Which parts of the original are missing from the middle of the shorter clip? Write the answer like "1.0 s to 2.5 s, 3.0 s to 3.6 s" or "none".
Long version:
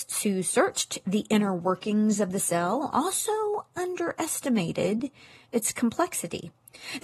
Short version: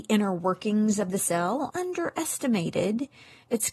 2.9 s to 3.7 s